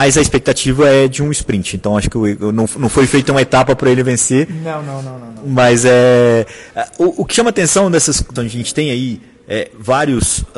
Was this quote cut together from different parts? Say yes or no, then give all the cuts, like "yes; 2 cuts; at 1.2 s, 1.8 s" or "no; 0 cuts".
yes; 1 cut; at 8.4 s